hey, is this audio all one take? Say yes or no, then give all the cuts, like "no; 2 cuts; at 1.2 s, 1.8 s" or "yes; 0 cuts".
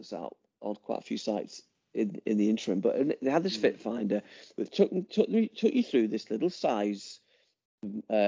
yes; 0 cuts